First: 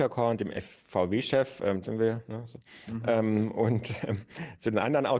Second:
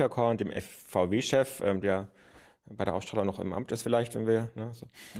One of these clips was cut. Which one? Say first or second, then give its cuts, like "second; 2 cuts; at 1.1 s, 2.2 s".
first; 1 cut; at 1.8 s